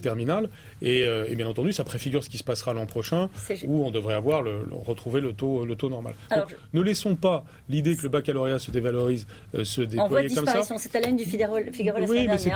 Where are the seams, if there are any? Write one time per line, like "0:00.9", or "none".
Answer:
none